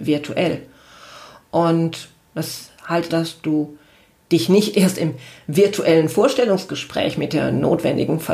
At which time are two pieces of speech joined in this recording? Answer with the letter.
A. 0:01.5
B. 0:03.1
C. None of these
B